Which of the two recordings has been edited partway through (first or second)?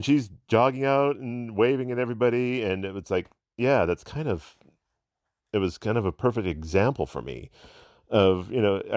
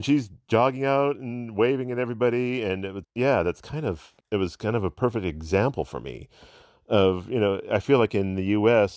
second